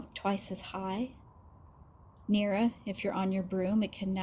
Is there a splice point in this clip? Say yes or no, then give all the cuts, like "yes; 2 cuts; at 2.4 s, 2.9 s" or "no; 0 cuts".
no; 0 cuts